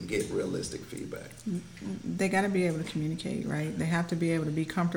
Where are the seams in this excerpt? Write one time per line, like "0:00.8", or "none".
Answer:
none